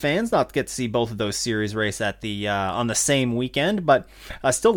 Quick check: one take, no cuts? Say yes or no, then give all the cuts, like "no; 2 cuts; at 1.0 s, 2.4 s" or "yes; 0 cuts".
yes; 0 cuts